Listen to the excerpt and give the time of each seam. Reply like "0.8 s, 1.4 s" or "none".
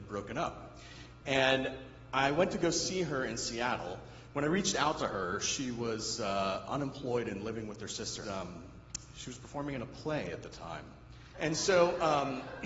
8.2 s, 11.3 s